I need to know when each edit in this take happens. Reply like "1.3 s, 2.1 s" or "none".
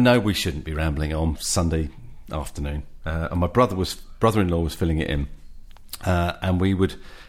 1.4 s